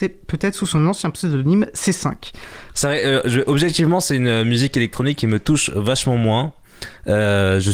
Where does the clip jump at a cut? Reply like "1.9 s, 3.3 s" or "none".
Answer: 2.7 s